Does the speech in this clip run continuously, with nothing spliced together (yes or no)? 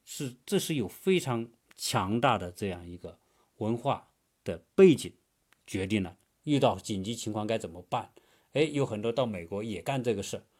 no